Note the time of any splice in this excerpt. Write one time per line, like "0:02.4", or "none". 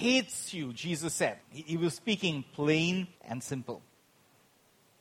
0:01.4
0:03.1